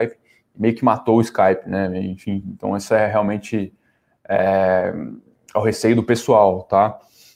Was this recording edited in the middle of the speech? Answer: no; 0 cuts

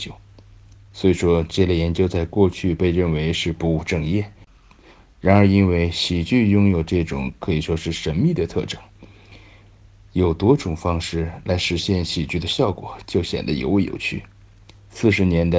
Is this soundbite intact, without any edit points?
yes; 0 cuts

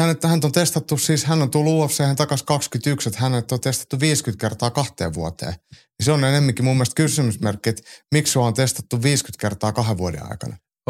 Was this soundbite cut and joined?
no; 0 cuts

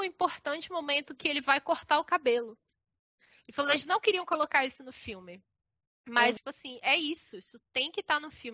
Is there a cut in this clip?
yes; 1 cut; at 6.4 s

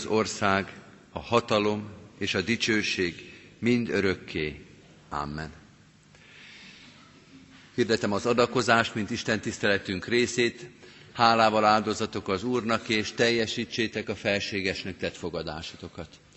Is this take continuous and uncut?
yes; 0 cuts

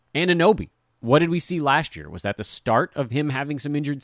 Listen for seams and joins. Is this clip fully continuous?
yes; 0 cuts

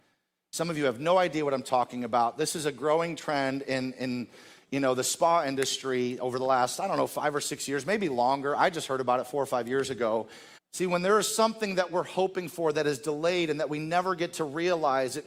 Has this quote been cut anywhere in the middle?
yes; 1 cut; at 10.6 s

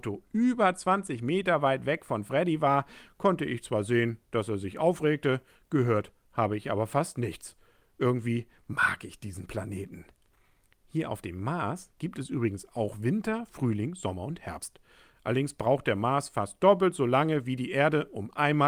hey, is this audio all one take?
yes; 0 cuts

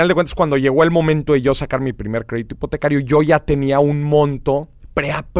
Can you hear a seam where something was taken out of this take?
no; 0 cuts

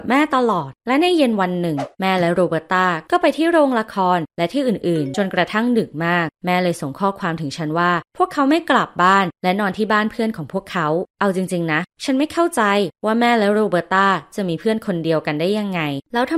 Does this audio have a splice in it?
no; 0 cuts

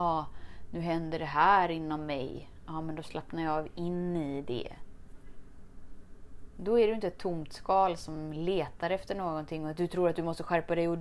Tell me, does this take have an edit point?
no; 0 cuts

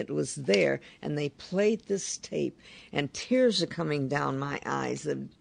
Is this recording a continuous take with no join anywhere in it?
yes; 0 cuts

